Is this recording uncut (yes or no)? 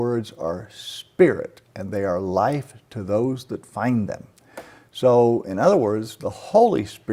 yes